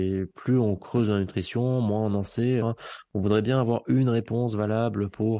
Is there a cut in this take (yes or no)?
yes